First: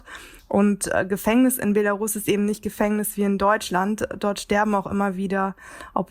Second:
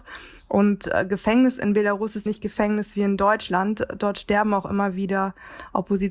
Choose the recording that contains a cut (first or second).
second